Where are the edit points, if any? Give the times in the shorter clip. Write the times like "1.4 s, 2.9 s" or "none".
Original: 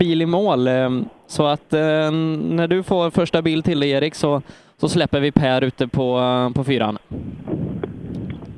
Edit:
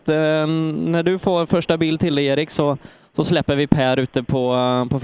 none